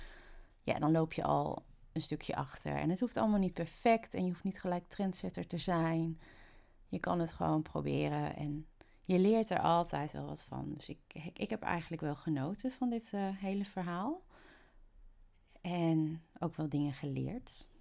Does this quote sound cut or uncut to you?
uncut